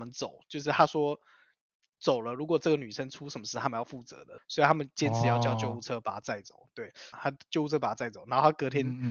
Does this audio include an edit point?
yes; 2 cuts; at 4.4 s, 7.1 s

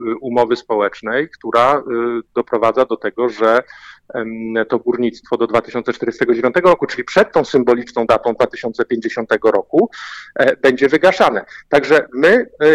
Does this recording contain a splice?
no; 0 cuts

